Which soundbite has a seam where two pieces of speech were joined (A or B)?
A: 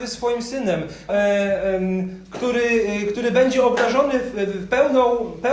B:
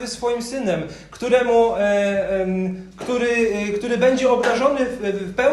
A